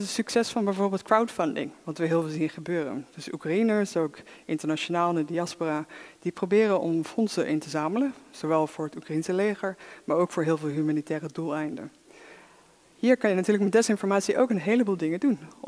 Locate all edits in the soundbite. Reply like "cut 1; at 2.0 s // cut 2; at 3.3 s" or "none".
none